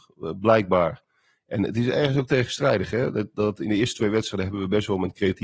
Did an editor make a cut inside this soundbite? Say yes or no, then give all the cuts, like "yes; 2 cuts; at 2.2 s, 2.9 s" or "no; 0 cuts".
no; 0 cuts